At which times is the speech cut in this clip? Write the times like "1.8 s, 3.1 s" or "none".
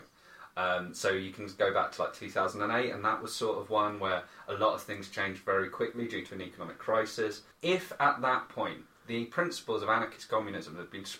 7.5 s